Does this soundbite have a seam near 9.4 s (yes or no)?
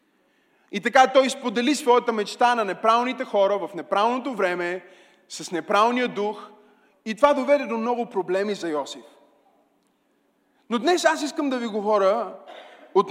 no